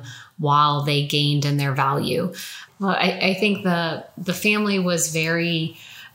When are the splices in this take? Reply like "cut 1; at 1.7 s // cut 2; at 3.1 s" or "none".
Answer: cut 1; at 2.7 s